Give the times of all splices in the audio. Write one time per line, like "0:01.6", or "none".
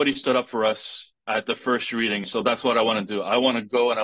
0:02.2